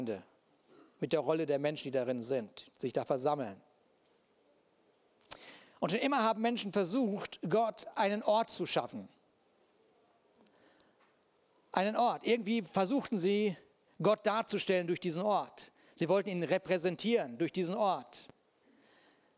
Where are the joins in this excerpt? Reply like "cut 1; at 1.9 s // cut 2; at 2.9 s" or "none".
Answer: none